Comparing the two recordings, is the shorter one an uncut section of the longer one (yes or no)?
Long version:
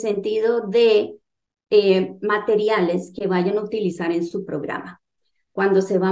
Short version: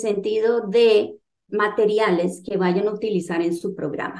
no